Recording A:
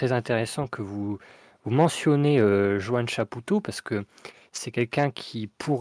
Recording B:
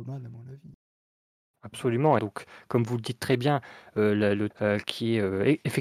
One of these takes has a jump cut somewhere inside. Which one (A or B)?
B